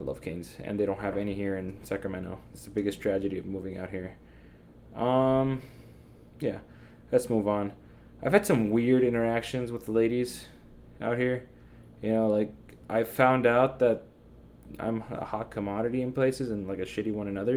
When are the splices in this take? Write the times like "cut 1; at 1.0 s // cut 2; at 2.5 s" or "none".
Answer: none